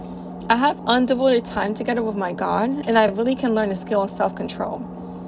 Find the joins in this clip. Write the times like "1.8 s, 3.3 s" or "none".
none

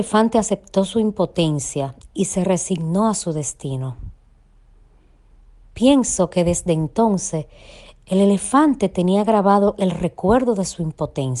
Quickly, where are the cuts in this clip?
none

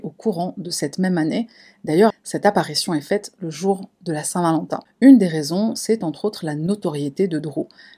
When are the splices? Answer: 2.1 s, 4.9 s

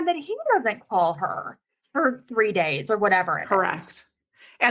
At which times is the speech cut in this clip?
none

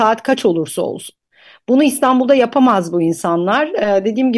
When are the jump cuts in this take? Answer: none

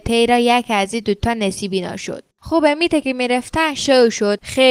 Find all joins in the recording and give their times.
2.3 s

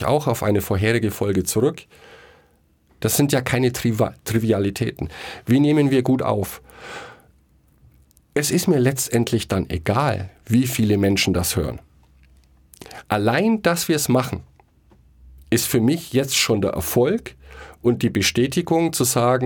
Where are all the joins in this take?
2.9 s

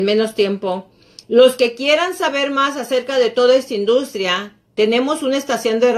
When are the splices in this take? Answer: 1.2 s

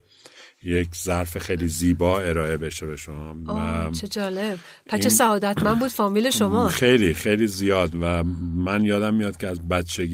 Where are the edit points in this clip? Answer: none

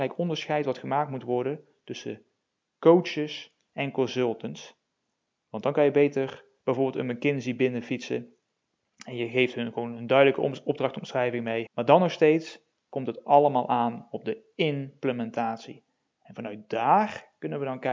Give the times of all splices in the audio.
11.7 s, 16.1 s

